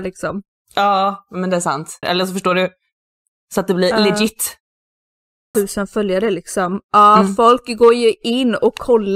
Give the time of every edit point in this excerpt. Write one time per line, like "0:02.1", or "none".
0:02.0
0:05.5